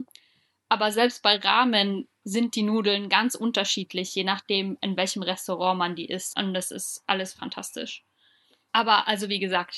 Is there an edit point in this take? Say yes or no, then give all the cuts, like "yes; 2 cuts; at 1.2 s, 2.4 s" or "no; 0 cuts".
yes; 1 cut; at 6.3 s